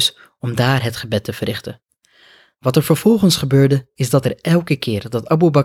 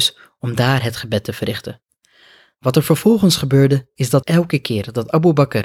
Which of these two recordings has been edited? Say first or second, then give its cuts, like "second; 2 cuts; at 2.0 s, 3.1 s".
second; 1 cut; at 4.2 s